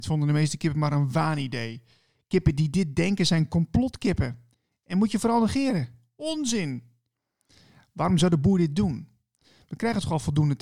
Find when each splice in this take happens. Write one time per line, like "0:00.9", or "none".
none